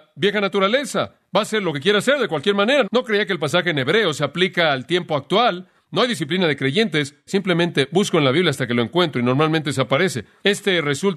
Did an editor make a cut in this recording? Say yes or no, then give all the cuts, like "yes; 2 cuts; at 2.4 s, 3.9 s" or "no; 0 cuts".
yes; 2 cuts; at 2.8 s, 7.3 s